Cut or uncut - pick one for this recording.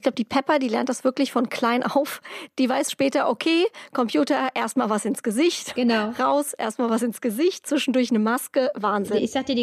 uncut